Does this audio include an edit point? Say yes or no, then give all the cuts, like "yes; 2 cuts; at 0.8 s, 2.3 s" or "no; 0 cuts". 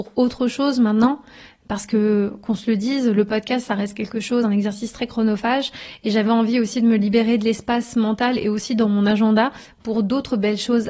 no; 0 cuts